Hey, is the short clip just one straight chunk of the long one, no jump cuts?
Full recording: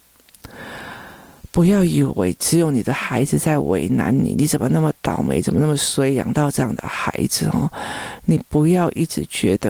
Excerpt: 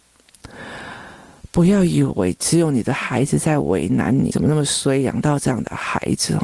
no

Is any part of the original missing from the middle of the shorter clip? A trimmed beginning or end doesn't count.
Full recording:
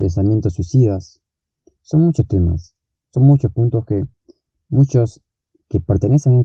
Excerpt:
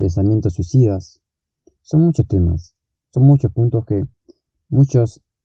no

